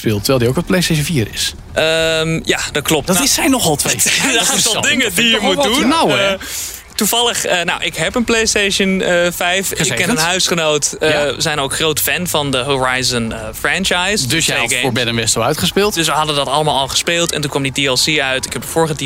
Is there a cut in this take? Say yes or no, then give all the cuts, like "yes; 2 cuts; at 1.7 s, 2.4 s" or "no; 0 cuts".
no; 0 cuts